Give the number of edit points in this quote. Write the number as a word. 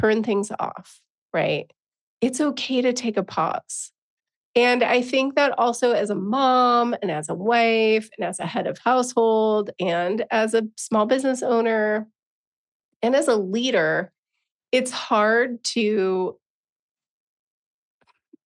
zero